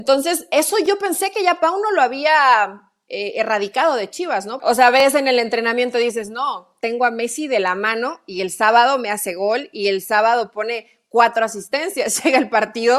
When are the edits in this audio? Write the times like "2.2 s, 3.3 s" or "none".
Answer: 4.6 s